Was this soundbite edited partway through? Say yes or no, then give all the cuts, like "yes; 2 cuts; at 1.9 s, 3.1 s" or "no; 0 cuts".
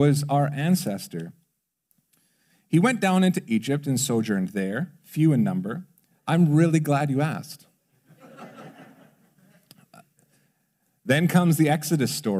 yes; 1 cut; at 6.1 s